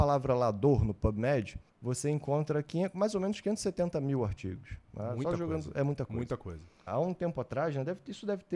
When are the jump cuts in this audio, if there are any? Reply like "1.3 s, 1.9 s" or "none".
1.7 s, 6.9 s